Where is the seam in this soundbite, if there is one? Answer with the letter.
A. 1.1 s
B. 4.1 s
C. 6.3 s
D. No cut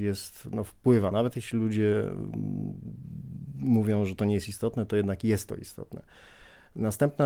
D